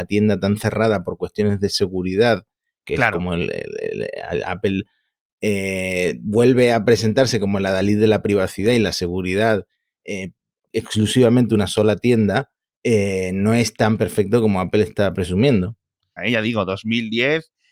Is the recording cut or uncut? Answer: cut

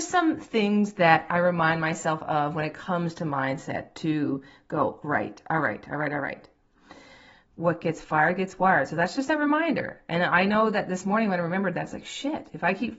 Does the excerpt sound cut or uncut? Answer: cut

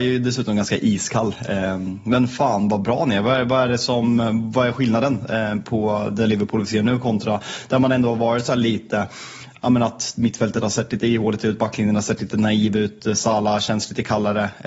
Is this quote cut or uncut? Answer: uncut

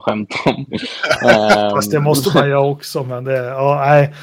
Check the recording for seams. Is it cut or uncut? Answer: uncut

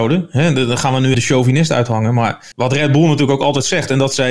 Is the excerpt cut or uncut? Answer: cut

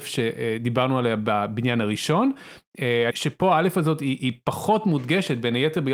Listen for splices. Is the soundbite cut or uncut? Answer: cut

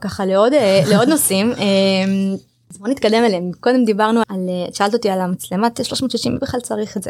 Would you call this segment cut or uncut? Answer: cut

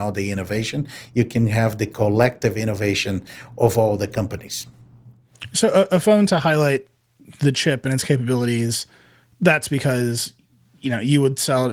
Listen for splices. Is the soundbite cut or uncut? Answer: uncut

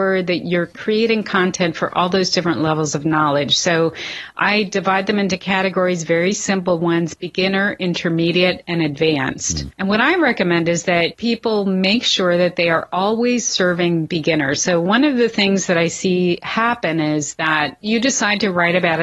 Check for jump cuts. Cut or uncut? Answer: uncut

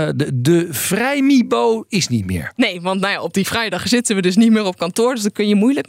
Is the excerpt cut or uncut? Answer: uncut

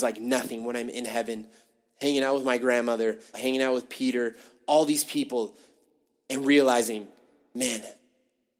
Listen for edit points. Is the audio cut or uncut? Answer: cut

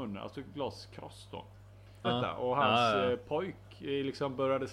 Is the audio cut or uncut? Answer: cut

